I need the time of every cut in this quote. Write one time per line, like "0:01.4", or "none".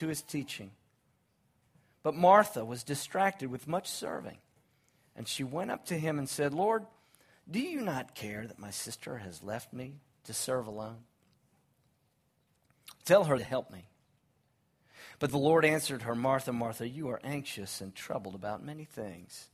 0:13.4